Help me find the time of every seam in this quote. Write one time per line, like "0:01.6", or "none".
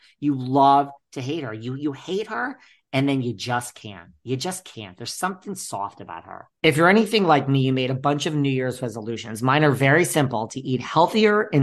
0:06.6